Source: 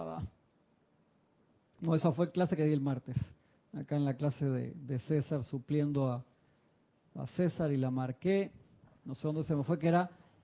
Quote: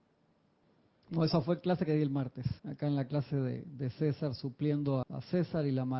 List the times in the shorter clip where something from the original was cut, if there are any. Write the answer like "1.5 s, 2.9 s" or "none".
2.6 s, 5.0 s